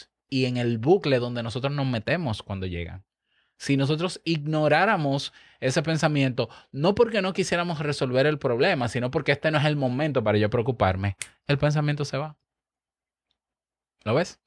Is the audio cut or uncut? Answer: uncut